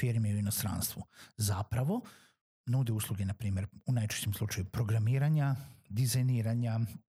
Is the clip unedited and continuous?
yes; 0 cuts

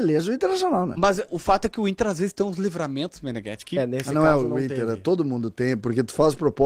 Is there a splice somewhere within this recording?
yes; 1 cut; at 1.3 s

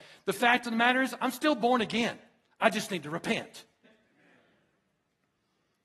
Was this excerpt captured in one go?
no; 1 cut; at 3.8 s

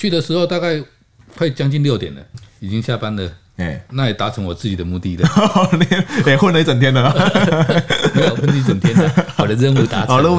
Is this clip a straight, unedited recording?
no; 1 cut; at 2.3 s

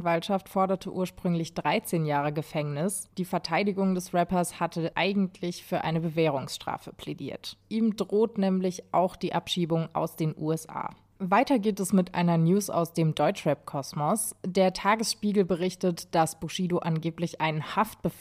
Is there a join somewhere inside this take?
yes; 2 cuts; at 7.6 s, 11.2 s

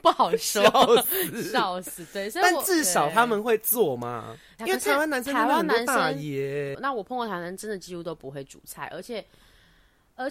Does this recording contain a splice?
yes; 2 cuts; at 4.6 s, 6.7 s

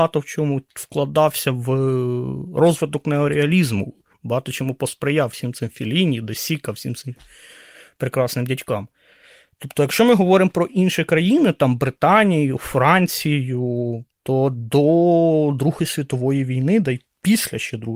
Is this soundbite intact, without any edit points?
yes; 0 cuts

